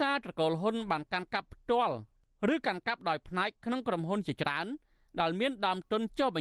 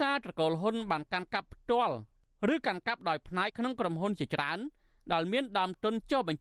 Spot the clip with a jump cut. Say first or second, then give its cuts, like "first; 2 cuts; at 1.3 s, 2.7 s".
second; 1 cut; at 3.5 s